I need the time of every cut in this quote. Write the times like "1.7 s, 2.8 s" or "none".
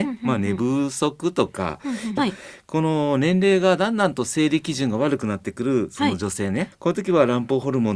2.2 s, 6.7 s